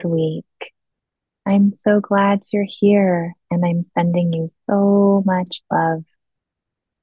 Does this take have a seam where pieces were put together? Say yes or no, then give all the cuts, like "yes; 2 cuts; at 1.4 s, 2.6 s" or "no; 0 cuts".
no; 0 cuts